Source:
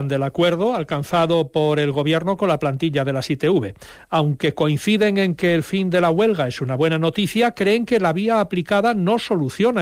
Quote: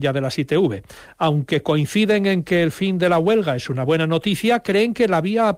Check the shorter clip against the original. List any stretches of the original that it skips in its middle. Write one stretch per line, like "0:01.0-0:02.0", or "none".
none